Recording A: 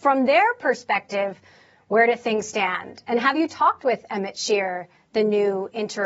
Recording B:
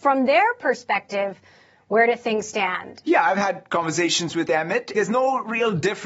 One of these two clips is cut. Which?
B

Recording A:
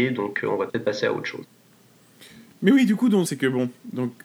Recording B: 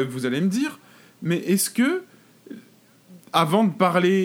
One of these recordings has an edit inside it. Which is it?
A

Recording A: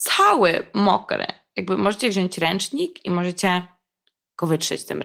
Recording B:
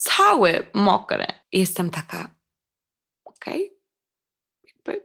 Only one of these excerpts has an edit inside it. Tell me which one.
B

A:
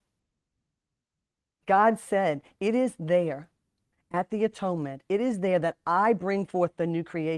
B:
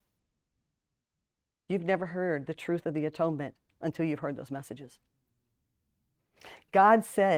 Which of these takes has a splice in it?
A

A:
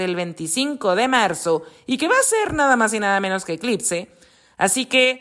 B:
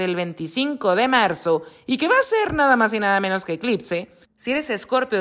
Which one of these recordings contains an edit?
B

